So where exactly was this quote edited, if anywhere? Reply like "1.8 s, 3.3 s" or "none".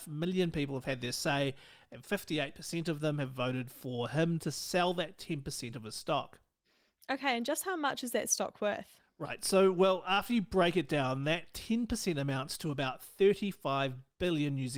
none